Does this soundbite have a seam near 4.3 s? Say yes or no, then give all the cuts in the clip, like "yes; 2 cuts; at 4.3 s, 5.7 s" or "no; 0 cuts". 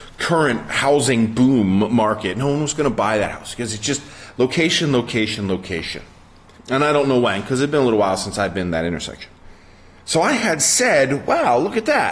no; 1 cut; at 6.6 s